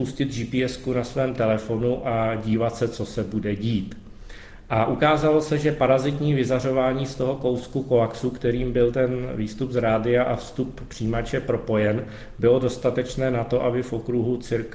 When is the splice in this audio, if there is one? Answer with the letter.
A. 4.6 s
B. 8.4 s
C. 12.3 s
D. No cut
D